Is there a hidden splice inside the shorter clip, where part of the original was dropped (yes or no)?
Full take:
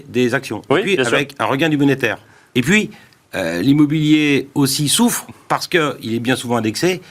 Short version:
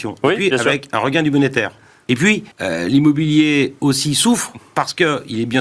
yes